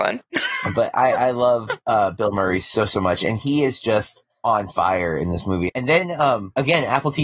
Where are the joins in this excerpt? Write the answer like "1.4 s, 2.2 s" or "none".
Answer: 5.7 s